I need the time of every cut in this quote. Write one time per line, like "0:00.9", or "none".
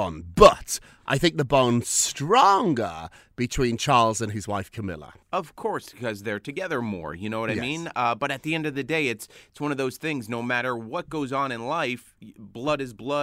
0:05.2